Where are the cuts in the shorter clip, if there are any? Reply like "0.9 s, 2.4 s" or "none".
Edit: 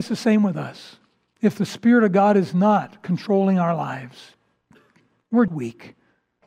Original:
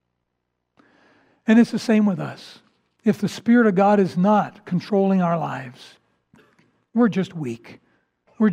5.5 s